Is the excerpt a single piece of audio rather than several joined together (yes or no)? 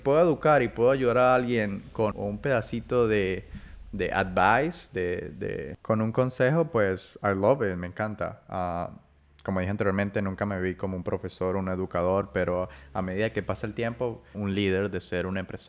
no